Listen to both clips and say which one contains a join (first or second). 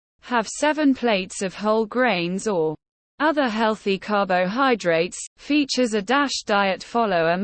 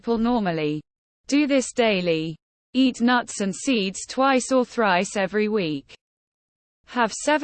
first